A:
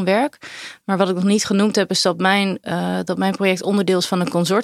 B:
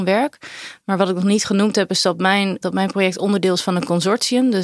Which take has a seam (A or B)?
B